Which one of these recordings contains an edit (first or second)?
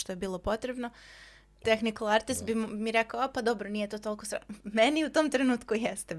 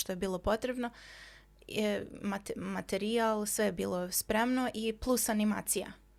first